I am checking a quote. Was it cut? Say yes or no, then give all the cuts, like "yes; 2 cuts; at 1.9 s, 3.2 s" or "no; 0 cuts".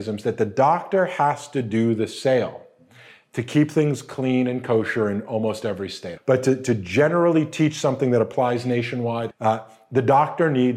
yes; 2 cuts; at 6.2 s, 9.3 s